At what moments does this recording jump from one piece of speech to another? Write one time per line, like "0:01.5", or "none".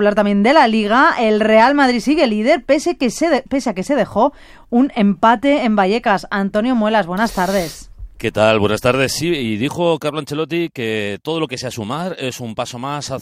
none